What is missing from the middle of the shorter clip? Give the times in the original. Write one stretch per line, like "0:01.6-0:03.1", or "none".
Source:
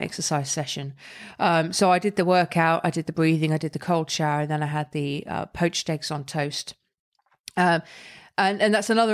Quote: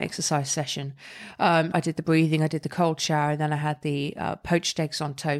0:01.7-0:02.8